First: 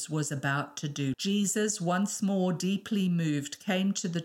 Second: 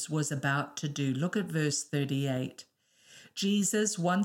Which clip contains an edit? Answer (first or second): first